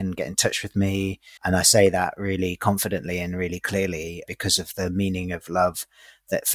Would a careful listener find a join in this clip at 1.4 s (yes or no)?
yes